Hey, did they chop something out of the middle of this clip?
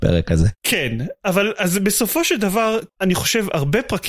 yes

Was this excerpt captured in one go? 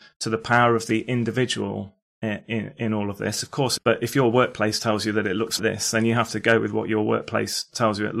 no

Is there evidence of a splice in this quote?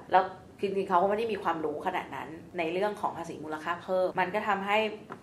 yes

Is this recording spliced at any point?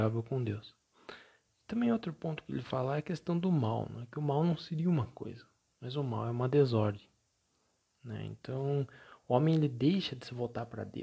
no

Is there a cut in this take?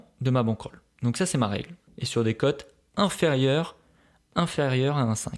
yes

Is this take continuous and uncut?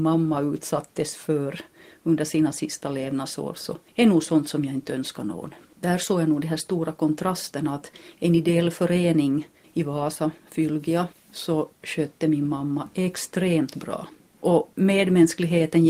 yes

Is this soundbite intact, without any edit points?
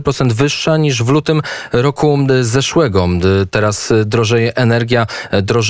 yes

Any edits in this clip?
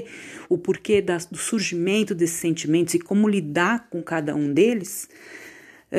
no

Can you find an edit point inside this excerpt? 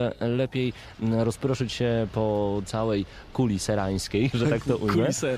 yes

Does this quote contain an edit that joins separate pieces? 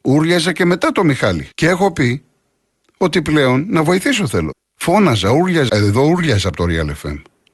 yes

